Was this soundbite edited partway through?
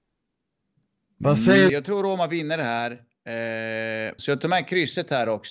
yes; 2 cuts; at 1.7 s, 4.2 s

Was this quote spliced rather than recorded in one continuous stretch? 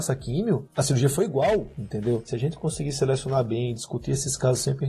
no; 0 cuts

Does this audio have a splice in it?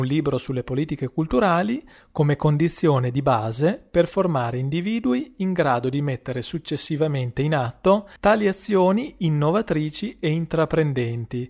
yes; 2 cuts; at 2.0 s, 8.2 s

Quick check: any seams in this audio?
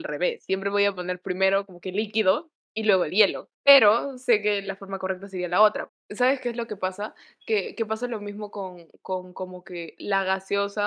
yes; 2 cuts; at 3.5 s, 5.9 s

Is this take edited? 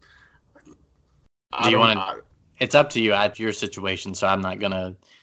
yes; 1 cut; at 3.3 s

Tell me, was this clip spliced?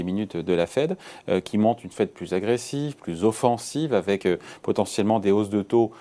no; 0 cuts

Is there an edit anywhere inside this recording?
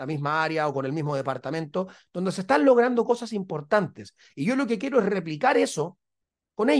no; 0 cuts

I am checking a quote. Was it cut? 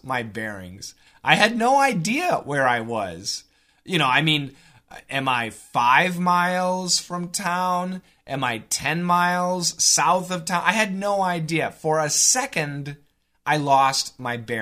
no; 0 cuts

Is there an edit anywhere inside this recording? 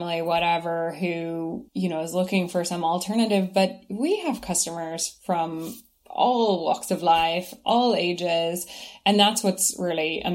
yes; 1 cut; at 1.7 s

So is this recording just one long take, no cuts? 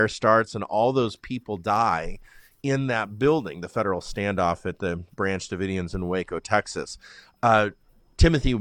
yes; 0 cuts

